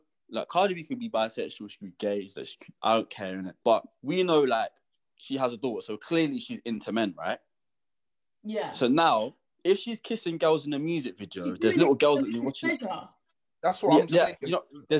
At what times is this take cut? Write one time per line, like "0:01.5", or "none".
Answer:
0:03.6

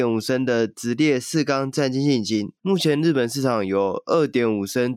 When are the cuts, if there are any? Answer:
0:02.6

